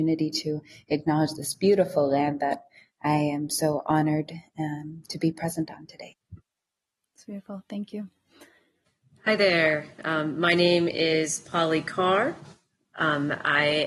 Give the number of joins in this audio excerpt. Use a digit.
0